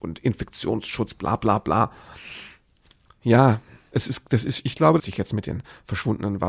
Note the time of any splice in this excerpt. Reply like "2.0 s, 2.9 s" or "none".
3.9 s, 5.0 s